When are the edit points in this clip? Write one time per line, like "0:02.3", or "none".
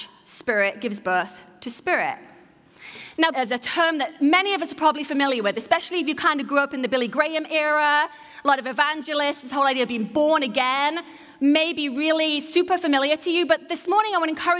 0:03.3